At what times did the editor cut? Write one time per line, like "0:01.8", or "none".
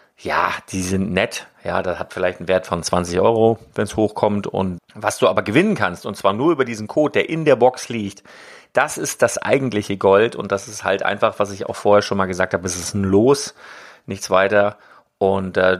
0:04.8